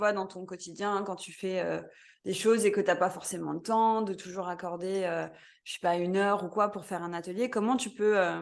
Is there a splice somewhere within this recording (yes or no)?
no